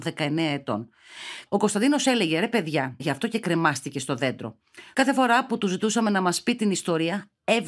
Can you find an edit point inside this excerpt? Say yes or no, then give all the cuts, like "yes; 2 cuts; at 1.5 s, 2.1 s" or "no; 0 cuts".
yes; 3 cuts; at 1.5 s, 3.0 s, 4.9 s